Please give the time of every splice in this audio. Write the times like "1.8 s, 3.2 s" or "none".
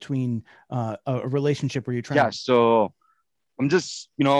2.3 s